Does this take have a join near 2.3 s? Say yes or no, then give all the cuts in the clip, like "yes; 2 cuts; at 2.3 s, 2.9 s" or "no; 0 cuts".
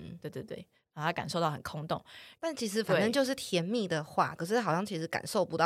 yes; 2 cuts; at 2.3 s, 4.4 s